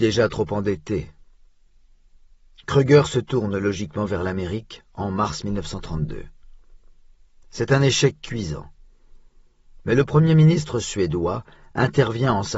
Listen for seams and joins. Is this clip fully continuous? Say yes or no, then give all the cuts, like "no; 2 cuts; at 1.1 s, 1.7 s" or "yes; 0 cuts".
yes; 0 cuts